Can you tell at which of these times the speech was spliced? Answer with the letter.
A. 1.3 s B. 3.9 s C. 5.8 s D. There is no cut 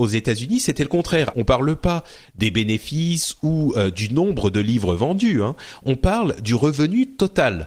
A